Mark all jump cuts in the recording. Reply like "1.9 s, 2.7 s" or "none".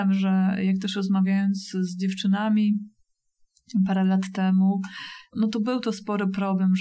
none